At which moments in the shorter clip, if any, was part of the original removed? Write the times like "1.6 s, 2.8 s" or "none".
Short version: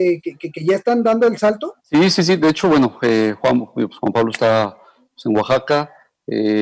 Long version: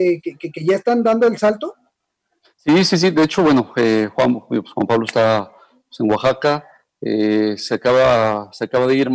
1.8 s